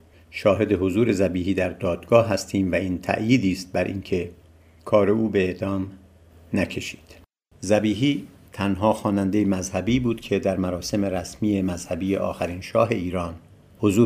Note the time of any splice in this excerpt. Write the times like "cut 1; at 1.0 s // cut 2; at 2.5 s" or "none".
cut 1; at 7.5 s